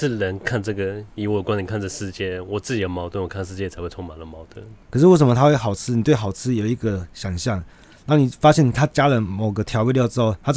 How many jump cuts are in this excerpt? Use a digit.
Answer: 1